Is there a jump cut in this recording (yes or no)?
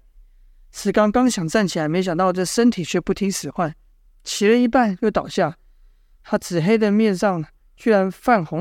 no